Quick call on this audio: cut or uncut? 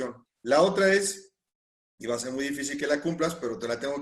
uncut